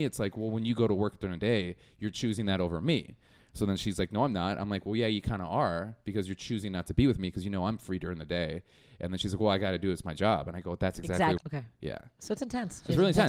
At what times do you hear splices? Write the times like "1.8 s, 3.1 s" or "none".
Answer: 11.4 s